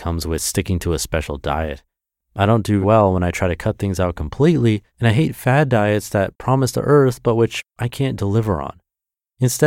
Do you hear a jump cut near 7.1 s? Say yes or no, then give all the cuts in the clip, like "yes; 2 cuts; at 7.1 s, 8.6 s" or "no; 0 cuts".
no; 2 cuts; at 2.8 s, 4.9 s